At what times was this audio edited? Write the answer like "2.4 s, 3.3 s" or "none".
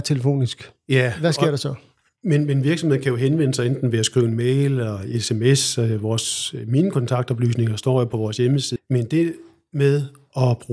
8.8 s